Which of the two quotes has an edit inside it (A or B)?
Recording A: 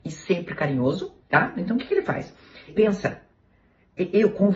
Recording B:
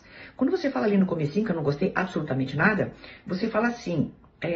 A